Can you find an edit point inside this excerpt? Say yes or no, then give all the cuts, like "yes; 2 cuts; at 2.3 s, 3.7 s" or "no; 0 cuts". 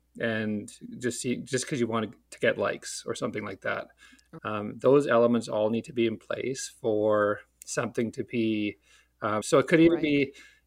yes; 2 cuts; at 4.4 s, 9.4 s